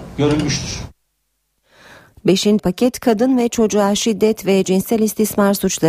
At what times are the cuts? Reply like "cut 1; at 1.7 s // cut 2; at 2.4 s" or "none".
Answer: cut 1; at 2.6 s